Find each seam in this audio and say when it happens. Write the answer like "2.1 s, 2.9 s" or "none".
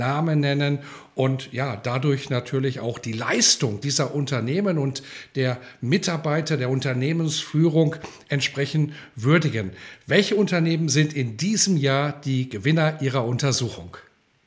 3.8 s